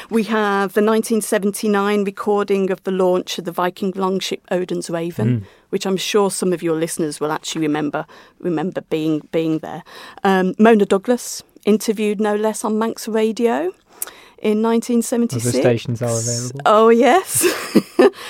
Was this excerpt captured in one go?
yes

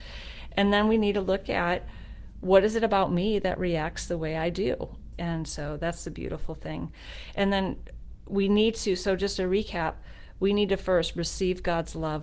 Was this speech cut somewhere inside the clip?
yes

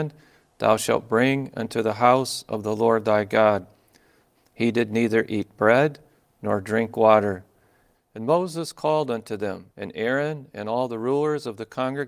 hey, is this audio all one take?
no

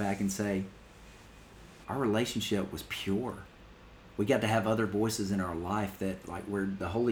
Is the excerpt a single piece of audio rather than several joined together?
no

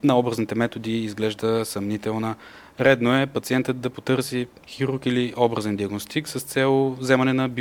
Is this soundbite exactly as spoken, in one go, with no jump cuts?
yes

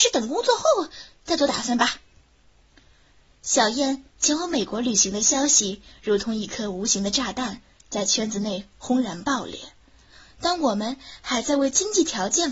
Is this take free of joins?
yes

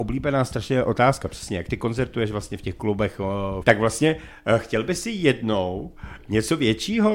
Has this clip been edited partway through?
yes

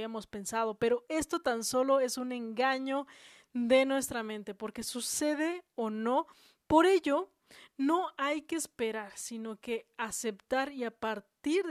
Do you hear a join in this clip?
no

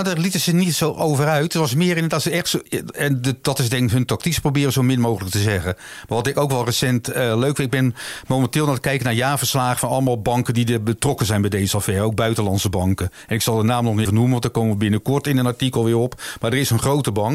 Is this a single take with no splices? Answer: no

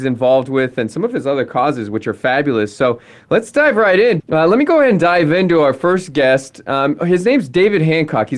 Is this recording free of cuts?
no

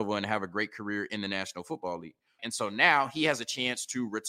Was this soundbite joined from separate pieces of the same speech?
yes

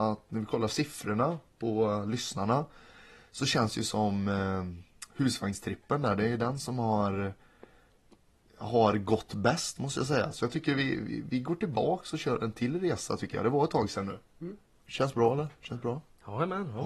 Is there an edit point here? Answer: no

